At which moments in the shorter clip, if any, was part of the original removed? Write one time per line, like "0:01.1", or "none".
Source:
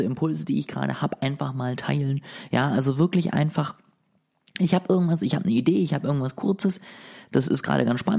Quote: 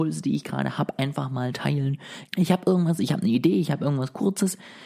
0:02.3